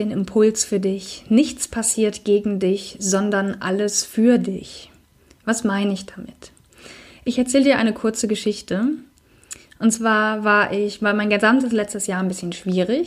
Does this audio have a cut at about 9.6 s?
no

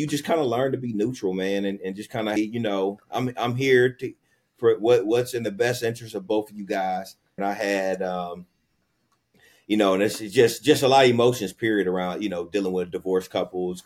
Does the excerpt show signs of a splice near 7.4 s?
yes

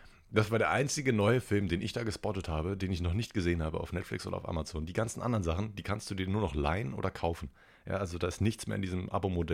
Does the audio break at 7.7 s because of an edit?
no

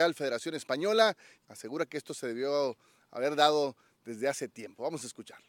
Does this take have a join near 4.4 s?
no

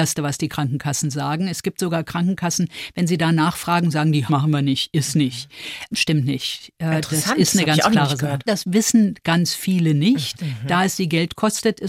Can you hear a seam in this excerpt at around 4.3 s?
yes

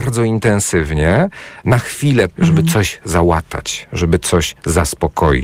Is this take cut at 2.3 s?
yes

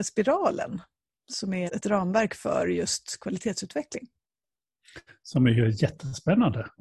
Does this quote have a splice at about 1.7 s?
yes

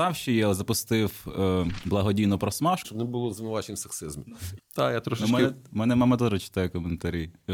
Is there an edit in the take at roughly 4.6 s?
yes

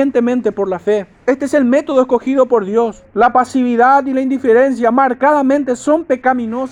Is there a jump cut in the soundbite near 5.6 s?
no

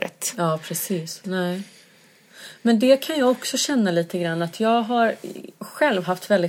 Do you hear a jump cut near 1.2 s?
yes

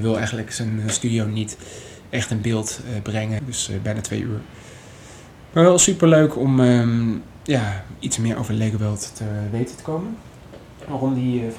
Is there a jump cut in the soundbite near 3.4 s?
yes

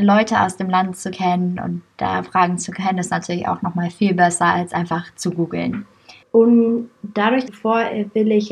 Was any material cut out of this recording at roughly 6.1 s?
no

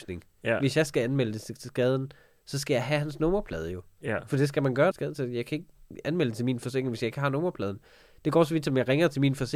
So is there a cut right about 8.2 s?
no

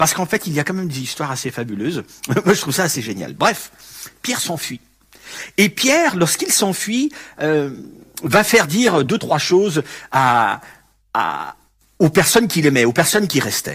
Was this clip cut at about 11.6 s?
no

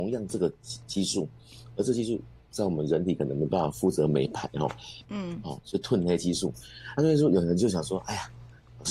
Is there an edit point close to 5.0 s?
yes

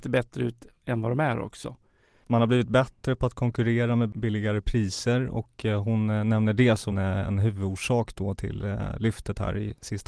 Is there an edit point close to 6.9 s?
yes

